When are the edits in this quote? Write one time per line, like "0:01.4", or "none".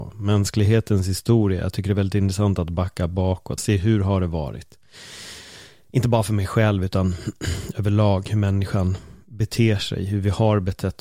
0:03.6